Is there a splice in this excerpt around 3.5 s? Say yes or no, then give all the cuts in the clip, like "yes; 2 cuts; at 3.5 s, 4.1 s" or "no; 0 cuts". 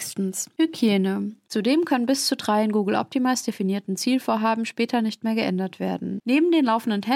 no; 2 cuts; at 1.5 s, 6.2 s